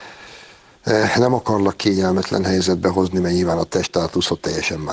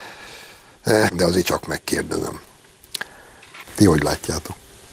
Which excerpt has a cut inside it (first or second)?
second